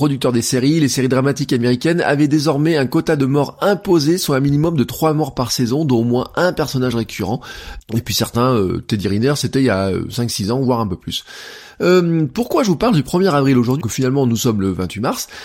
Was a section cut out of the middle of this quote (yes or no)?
yes